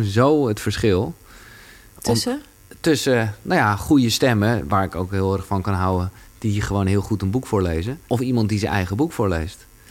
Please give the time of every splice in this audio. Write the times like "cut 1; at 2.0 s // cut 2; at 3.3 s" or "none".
cut 1; at 8.0 s